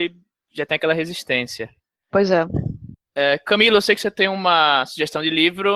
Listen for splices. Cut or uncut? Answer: cut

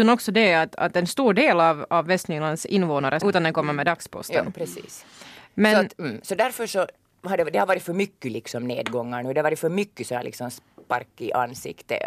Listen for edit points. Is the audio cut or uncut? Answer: cut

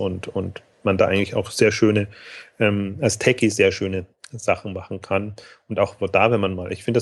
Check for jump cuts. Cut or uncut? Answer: uncut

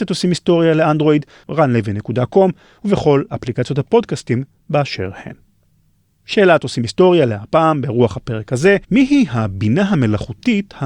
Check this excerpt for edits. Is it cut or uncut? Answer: cut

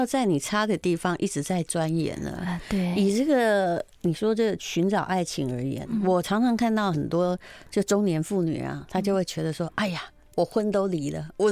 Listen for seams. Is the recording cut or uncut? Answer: uncut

